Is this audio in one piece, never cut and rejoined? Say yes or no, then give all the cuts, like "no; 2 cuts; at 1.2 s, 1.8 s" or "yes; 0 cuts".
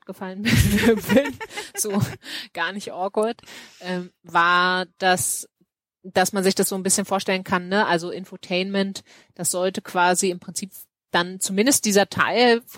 yes; 0 cuts